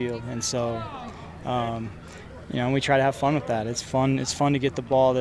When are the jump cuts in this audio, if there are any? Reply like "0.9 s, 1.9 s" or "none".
none